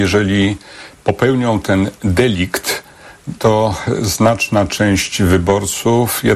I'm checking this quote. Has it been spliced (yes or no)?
yes